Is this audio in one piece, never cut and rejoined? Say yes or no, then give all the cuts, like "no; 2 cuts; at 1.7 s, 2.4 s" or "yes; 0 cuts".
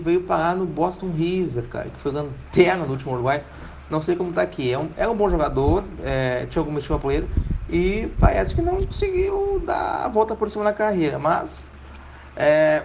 yes; 0 cuts